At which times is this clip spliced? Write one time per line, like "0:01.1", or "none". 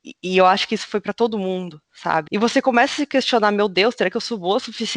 0:02.3